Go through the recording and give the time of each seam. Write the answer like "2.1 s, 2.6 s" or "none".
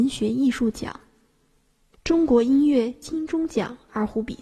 1.9 s